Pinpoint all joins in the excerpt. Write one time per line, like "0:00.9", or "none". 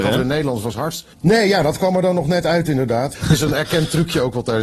0:01.1
0:03.1

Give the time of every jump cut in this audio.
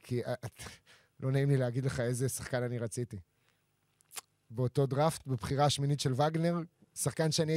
none

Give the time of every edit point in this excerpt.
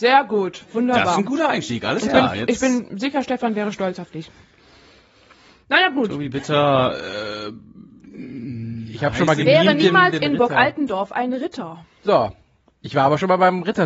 none

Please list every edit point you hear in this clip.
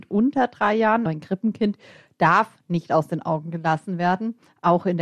0:01.1

